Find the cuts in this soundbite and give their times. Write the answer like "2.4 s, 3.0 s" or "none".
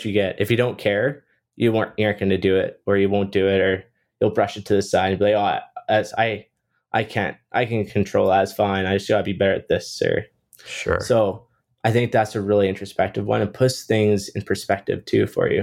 none